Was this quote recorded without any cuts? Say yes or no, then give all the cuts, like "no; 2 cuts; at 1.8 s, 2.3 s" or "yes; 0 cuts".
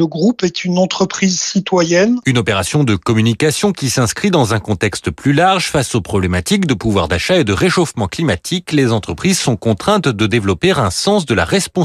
yes; 0 cuts